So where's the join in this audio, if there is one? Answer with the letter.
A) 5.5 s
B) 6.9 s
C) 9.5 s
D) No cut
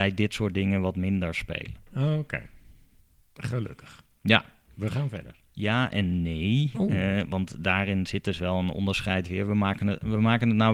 A